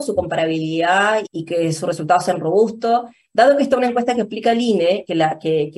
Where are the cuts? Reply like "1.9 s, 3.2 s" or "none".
1.3 s, 3.2 s